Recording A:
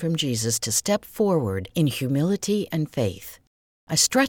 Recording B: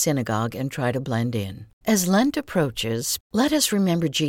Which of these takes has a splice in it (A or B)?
B